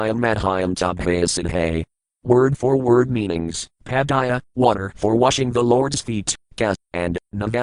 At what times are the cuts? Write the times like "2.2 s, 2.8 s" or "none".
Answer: 3.7 s, 6.5 s